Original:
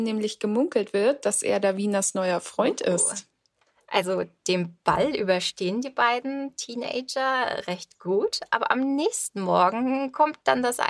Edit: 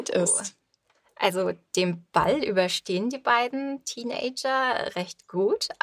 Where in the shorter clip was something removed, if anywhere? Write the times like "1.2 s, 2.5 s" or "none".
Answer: none